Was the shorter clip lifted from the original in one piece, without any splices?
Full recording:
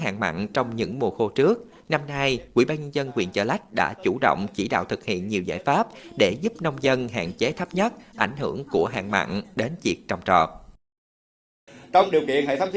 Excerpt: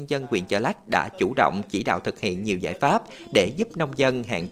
yes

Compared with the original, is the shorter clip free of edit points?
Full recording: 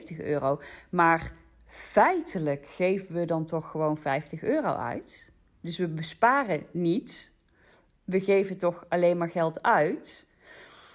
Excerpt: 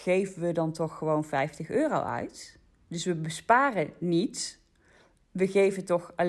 yes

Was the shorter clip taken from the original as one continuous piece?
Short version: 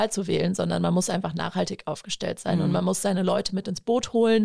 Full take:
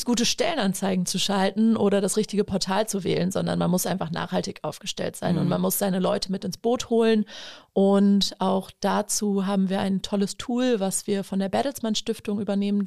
yes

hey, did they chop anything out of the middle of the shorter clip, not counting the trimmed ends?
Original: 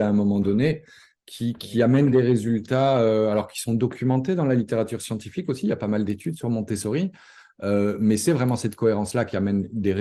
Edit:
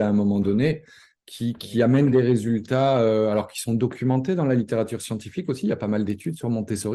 no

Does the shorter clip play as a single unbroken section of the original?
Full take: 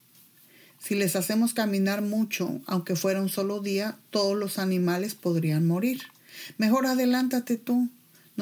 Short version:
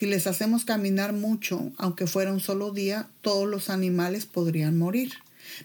yes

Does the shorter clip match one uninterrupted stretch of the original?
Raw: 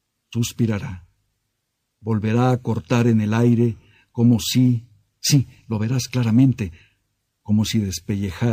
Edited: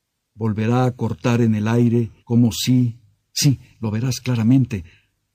no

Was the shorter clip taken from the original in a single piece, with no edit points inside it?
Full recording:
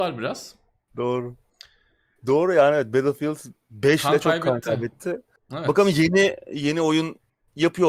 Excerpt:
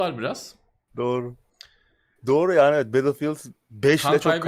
yes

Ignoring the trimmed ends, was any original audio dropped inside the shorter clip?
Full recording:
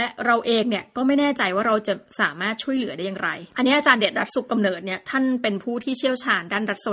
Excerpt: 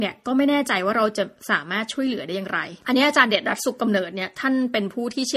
no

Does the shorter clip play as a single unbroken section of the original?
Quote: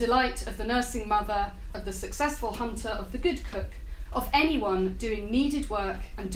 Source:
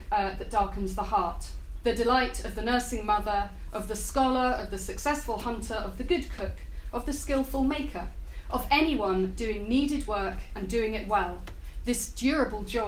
no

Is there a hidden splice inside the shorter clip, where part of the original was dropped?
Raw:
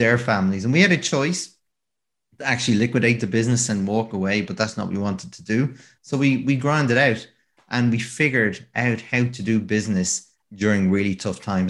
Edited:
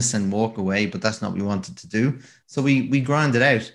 no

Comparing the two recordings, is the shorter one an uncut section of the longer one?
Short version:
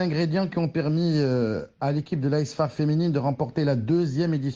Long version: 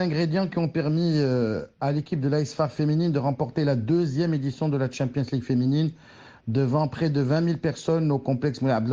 yes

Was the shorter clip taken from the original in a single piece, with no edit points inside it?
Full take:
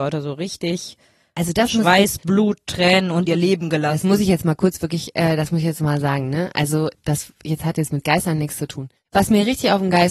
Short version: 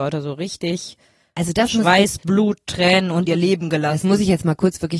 yes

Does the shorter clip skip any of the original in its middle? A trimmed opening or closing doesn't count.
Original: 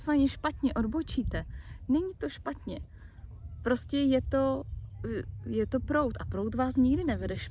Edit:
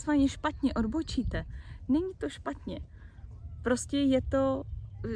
no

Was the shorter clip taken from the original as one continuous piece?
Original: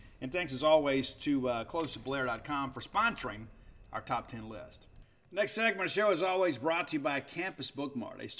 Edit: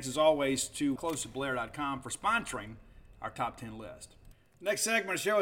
no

